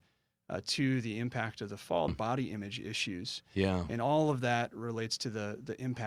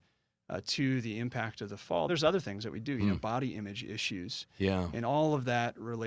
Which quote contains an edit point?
first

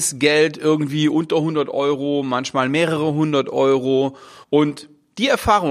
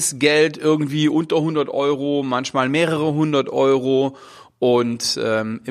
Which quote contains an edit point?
first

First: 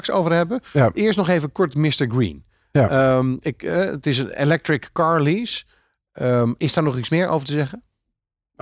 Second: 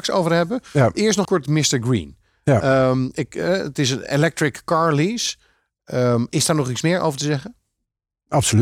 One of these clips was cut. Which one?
second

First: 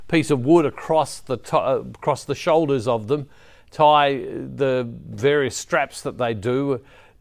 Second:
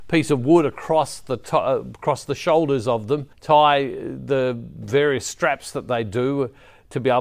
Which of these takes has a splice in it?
second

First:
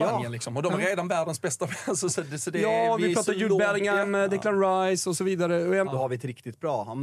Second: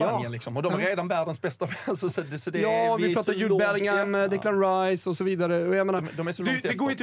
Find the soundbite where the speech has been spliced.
first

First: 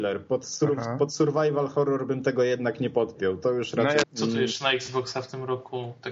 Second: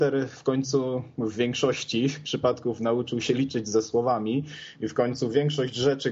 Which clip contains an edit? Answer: first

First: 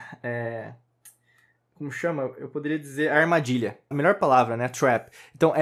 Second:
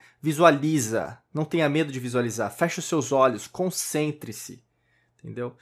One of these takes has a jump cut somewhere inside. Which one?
first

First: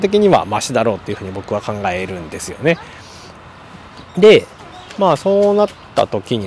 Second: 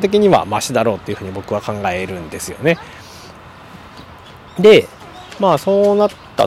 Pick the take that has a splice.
first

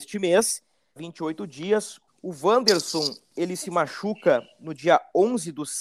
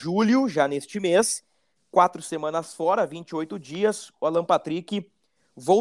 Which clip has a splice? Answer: first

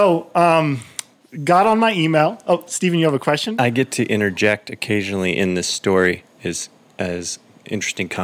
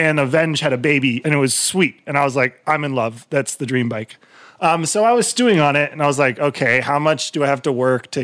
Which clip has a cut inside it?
second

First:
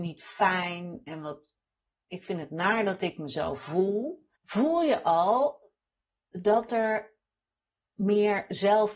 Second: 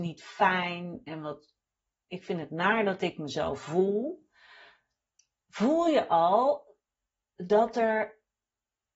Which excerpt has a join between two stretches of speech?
first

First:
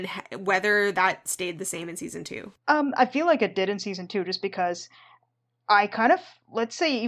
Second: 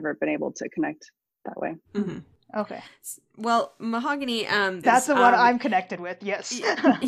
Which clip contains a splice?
second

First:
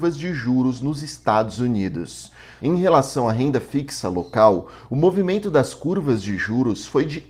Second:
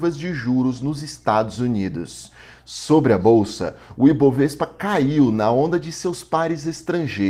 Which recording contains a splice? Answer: first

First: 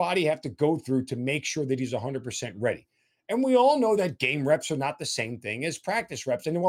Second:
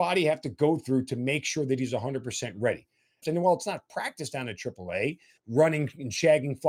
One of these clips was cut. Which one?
second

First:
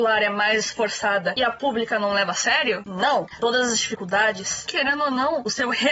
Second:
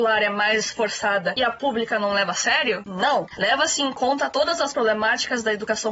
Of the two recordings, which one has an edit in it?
first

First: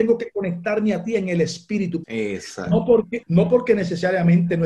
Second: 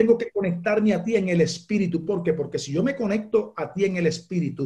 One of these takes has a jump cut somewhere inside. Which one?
first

